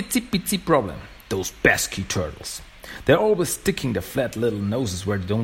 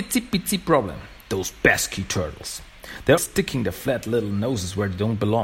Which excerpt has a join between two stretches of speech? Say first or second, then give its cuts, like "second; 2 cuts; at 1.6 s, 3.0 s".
second; 1 cut; at 3.2 s